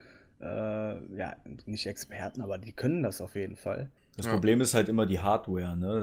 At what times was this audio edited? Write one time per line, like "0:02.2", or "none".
0:04.0